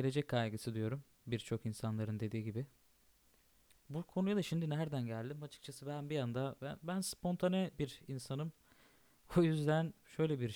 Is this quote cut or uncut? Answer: uncut